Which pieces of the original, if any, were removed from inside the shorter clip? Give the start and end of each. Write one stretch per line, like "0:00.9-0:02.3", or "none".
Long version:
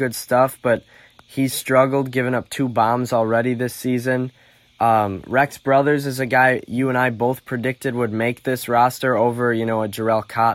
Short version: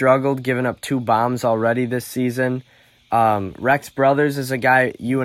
none